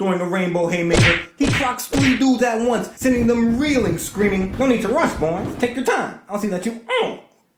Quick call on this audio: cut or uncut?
uncut